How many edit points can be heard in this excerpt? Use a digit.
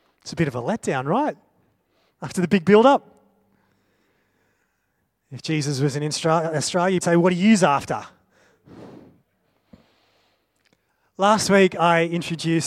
1